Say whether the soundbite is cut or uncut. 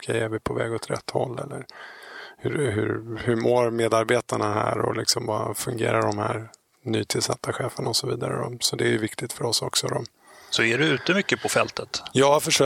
uncut